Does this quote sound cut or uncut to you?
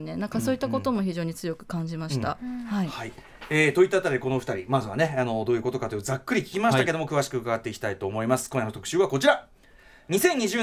uncut